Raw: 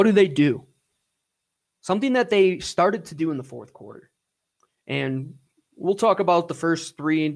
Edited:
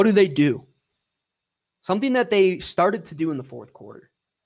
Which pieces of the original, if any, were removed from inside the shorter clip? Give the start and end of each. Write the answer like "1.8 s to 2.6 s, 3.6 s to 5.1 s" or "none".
none